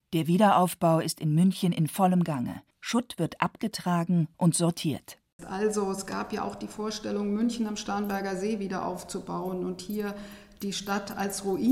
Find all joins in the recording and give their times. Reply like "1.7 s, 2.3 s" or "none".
2.7 s, 5.4 s